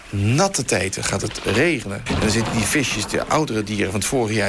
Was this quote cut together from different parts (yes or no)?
yes